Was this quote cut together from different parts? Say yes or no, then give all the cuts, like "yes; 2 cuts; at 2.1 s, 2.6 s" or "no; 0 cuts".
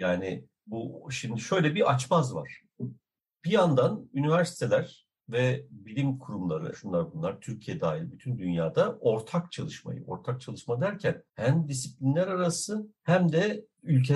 yes; 3 cuts; at 6.7 s, 11.3 s, 13.0 s